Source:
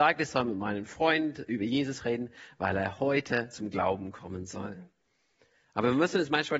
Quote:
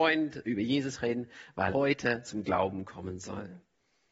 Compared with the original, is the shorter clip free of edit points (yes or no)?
no